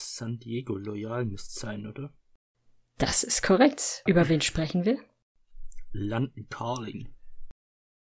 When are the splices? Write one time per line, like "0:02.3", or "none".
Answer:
0:04.1

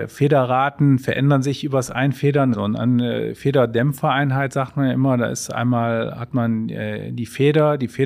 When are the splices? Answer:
0:02.5

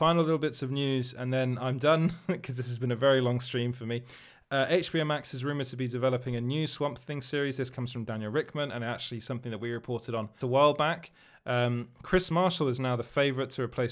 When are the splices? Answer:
0:10.4

